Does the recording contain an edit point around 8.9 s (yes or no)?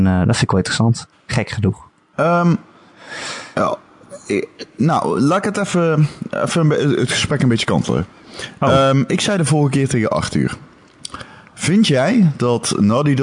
no